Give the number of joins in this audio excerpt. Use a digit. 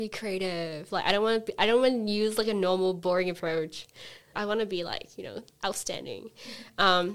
1